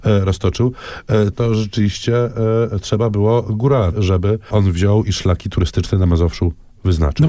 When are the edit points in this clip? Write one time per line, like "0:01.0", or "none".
0:01.3
0:03.9